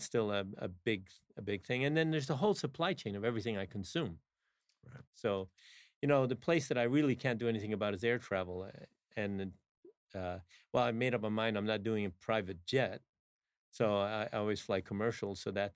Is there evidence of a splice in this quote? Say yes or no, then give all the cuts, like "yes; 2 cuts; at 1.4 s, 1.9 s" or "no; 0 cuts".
yes; 1 cut; at 5.1 s